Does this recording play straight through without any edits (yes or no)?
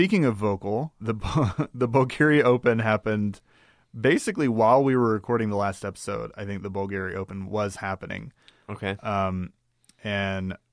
no